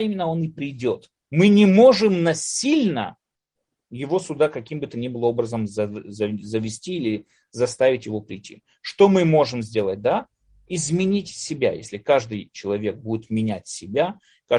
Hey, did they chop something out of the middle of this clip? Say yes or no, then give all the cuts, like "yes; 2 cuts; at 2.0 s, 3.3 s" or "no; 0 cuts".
yes; 1 cut; at 1.2 s